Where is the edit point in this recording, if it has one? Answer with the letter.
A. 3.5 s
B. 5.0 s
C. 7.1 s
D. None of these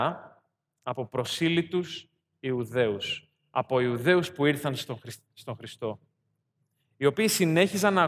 D